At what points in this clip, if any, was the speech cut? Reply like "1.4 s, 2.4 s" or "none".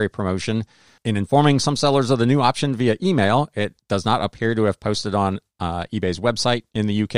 1.0 s